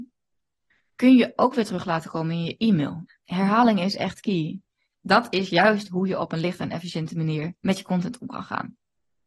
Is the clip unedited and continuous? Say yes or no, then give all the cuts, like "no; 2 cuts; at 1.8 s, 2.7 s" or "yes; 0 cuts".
no; 2 cuts; at 3.1 s, 5.0 s